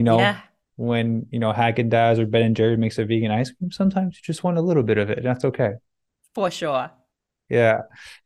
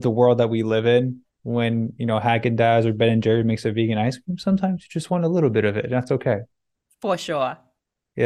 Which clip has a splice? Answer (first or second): second